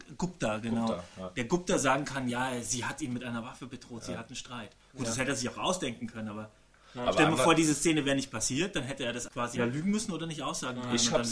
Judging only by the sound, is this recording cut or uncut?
cut